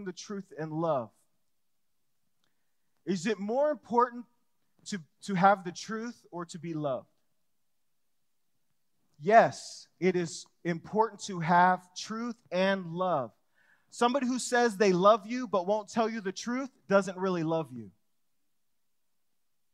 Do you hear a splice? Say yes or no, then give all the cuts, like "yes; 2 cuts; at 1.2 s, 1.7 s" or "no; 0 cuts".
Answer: no; 0 cuts